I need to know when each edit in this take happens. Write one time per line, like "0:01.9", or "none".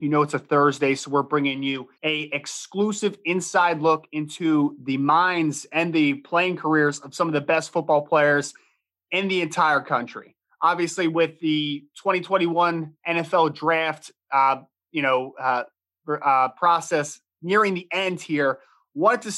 0:01.9